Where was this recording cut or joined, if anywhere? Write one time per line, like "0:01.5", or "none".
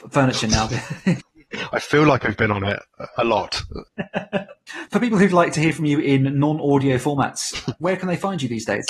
none